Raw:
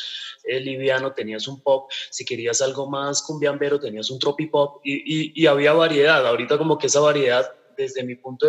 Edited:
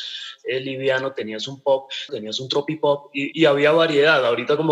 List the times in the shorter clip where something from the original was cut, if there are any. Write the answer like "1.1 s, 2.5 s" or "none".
2.1 s, 3.3 s